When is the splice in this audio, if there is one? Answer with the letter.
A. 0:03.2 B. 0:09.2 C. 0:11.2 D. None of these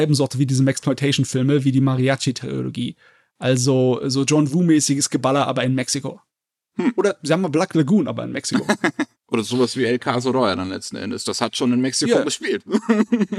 B